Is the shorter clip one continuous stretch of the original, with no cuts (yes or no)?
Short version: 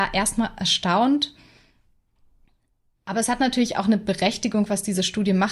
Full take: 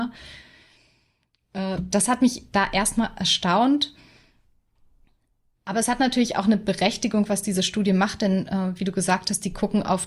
yes